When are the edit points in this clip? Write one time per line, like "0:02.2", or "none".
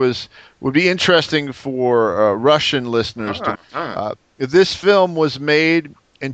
0:03.6